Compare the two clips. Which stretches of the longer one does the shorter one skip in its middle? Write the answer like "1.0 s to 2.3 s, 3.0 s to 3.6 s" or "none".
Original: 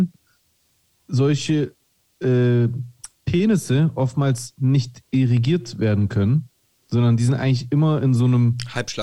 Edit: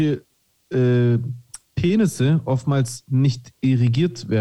none